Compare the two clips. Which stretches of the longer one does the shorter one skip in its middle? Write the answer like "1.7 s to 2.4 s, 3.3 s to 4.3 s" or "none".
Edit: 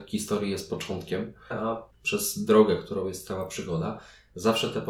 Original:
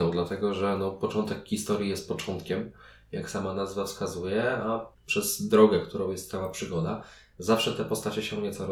2.9 s to 4.5 s